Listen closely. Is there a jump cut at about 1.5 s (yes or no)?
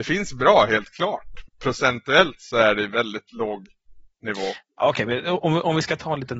yes